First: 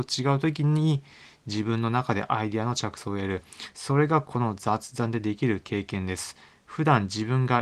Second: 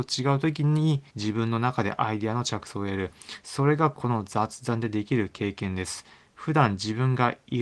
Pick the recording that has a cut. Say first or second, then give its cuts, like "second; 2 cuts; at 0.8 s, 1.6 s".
second; 1 cut; at 1.1 s